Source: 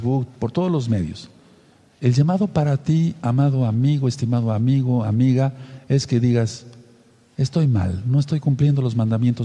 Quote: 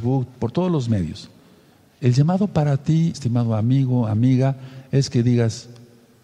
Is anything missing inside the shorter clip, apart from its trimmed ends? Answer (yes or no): yes